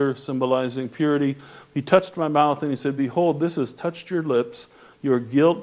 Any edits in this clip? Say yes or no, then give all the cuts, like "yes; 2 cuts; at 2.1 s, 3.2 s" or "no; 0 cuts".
no; 0 cuts